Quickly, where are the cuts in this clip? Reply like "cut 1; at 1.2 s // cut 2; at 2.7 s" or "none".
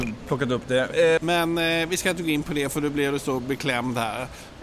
cut 1; at 1.2 s